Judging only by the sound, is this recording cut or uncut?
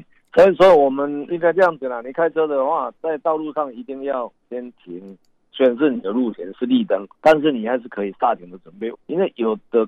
cut